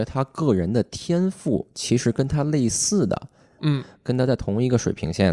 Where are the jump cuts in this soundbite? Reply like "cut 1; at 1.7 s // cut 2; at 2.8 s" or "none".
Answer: cut 1; at 3.6 s

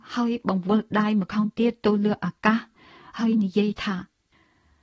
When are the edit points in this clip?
none

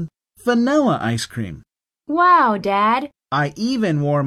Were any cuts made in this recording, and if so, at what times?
cut 1; at 3.2 s

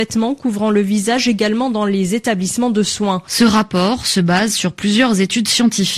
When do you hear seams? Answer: cut 1; at 3.3 s

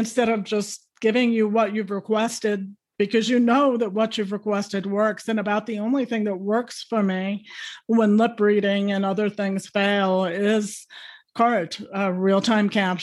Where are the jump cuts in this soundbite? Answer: none

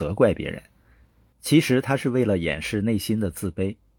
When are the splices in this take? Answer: cut 1; at 1.3 s

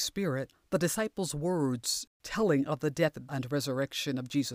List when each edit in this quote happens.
cut 1; at 3.3 s

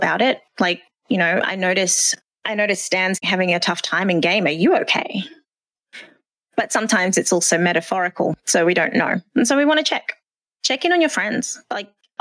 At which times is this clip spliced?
cut 1; at 5.8 s

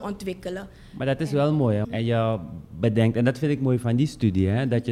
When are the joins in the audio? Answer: cut 1; at 1.8 s

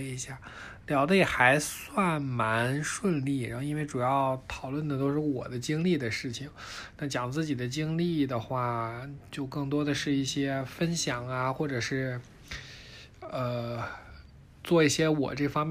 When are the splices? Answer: none

